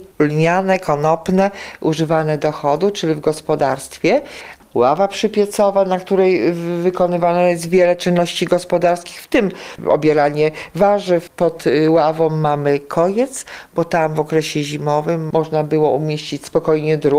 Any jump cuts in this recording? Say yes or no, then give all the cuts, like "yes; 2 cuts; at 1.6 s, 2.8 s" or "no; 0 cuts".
no; 0 cuts